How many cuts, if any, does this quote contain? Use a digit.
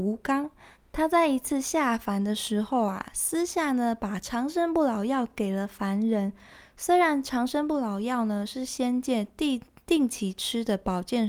0